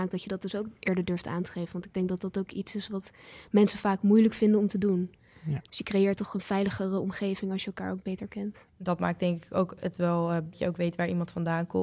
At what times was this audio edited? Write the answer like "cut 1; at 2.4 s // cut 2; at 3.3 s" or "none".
cut 1; at 8.7 s // cut 2; at 10.5 s